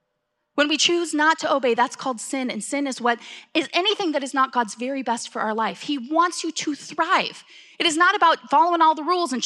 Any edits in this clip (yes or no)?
no